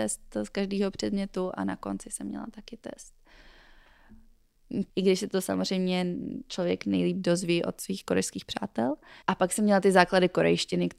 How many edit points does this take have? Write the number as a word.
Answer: two